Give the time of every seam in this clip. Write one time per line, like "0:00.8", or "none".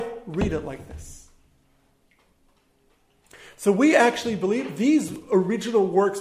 none